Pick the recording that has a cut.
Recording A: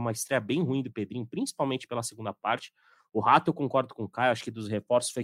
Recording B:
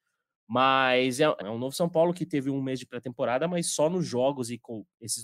B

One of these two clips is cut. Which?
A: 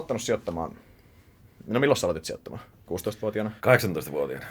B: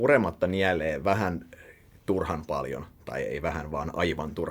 A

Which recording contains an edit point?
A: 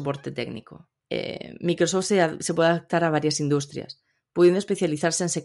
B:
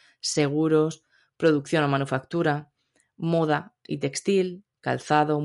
A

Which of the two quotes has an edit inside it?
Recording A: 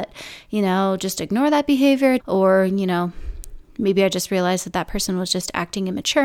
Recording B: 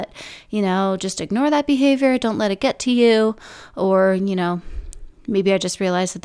A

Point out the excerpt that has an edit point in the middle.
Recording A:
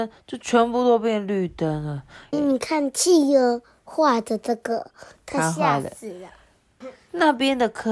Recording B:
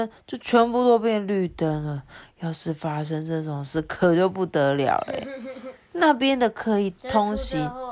A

